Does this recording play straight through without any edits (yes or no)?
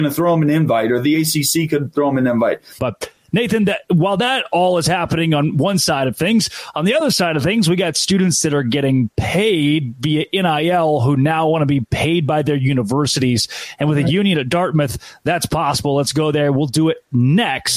no